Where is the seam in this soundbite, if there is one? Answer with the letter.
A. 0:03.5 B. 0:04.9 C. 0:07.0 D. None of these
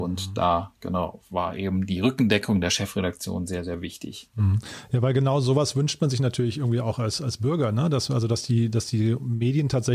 D